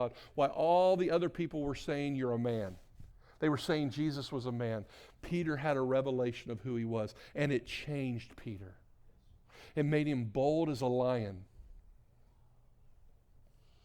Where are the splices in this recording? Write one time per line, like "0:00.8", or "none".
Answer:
none